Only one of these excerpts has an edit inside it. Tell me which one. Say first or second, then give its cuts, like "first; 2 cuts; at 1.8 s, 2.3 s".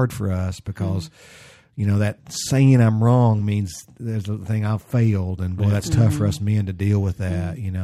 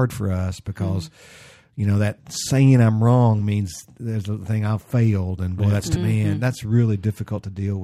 second; 1 cut; at 6.0 s